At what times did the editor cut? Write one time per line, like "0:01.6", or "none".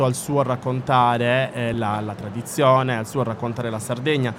none